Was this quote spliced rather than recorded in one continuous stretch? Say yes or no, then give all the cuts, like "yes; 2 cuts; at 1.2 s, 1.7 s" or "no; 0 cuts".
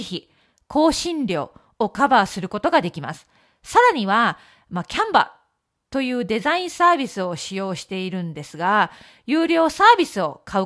no; 0 cuts